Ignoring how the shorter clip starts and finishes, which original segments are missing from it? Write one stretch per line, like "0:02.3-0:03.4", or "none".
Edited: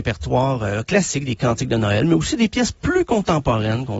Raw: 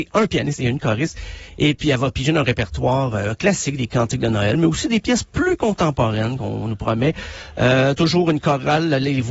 none

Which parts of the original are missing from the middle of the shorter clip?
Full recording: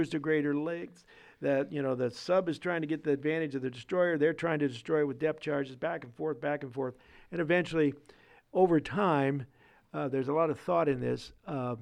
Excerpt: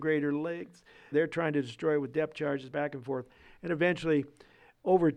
0:01.3-0:04.2
0:05.8-0:06.4

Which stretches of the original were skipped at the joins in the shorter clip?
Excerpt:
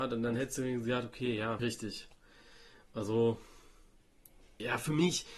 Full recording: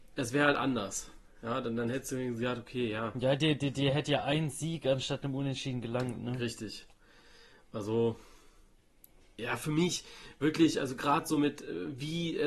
0:03.1-0:06.4

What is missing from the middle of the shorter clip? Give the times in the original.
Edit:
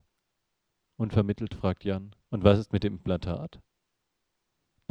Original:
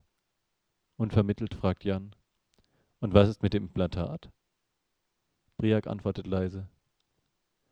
0:02.2-0:02.9

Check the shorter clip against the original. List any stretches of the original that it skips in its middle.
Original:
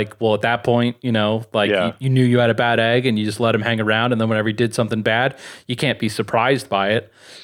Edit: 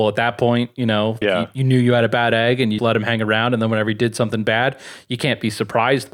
0:01.5-0:01.7
0:03.2-0:03.4

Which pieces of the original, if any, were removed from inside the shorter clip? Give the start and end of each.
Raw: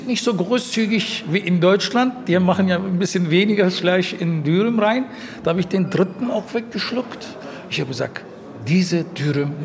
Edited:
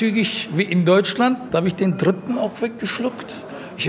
0:02.2-0:05.4

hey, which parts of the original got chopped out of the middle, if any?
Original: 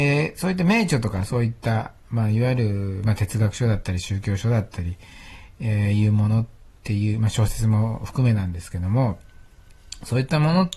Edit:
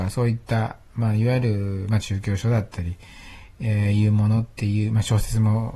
0:03.2-0:04.0
0:06.5-0:06.8

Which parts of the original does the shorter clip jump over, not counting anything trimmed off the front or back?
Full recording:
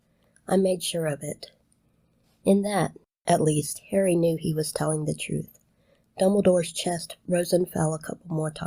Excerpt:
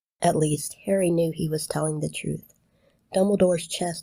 none

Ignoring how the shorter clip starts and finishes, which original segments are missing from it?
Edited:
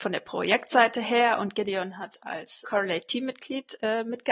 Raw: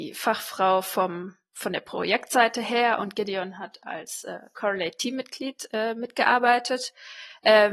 0:04.2-0:04.5

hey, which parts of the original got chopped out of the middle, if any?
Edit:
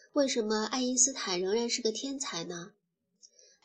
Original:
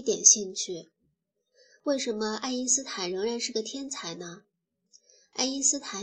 none

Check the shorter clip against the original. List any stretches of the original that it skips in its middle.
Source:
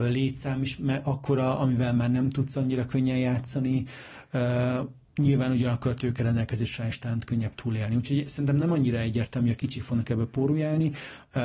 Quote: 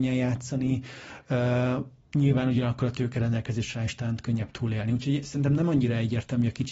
none

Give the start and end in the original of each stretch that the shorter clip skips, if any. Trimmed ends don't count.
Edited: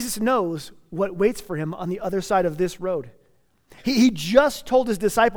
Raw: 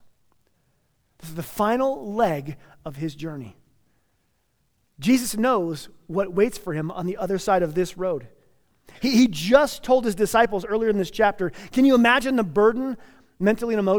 none

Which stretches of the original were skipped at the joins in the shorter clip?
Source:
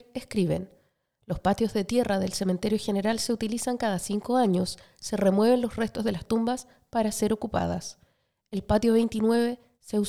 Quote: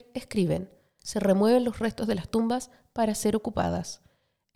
0:01.0-0:05.0

